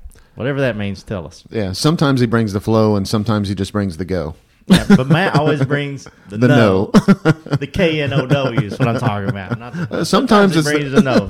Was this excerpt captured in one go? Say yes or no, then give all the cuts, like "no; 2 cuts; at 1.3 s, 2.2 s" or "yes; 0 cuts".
yes; 0 cuts